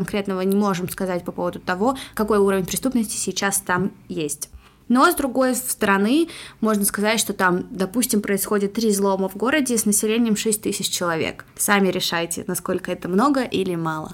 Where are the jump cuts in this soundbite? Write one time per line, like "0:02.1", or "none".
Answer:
none